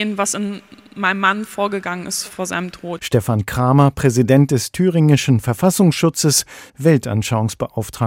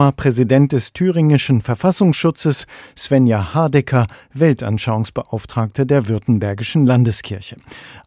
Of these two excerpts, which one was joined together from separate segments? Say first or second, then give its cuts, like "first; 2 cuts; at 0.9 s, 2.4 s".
first; 2 cuts; at 3.0 s, 6.7 s